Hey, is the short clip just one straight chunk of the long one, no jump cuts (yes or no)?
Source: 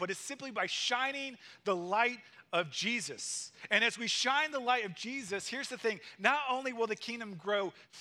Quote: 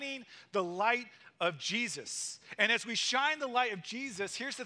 yes